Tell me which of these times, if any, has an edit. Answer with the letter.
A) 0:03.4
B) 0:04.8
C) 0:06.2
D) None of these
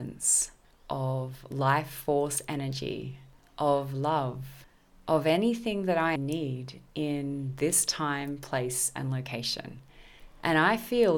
C